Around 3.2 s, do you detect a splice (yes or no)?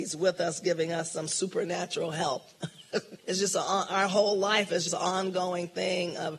yes